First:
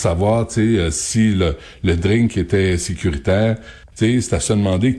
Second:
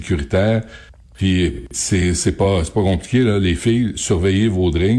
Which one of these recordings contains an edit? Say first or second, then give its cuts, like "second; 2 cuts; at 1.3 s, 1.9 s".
first; 1 cut; at 3.9 s